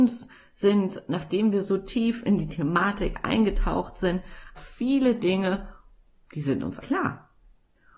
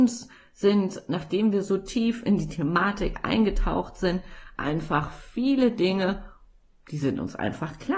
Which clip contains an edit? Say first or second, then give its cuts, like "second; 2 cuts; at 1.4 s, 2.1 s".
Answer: first; 2 cuts; at 4.6 s, 6.8 s